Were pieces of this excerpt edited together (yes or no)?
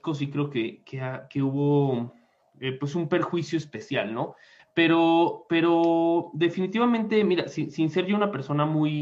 yes